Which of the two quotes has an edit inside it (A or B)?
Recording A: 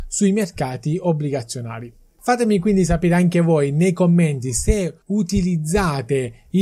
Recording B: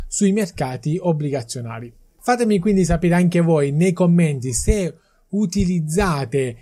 A